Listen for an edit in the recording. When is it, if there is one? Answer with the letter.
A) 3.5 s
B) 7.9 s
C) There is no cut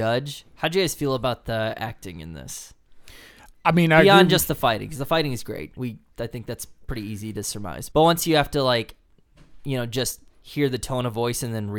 B